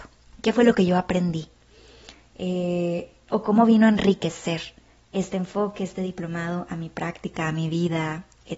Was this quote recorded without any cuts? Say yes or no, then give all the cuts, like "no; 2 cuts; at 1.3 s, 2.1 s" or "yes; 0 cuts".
yes; 0 cuts